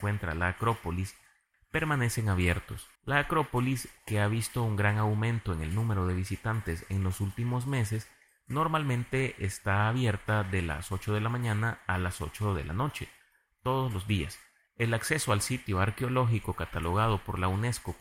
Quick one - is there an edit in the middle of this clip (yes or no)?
yes